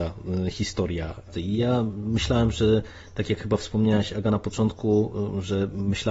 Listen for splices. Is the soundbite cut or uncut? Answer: cut